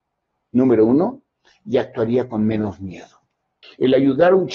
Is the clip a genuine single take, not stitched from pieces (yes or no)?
no